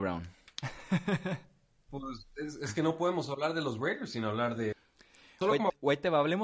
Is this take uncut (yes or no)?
yes